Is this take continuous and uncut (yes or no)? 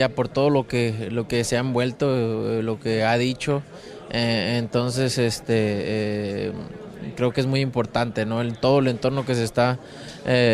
yes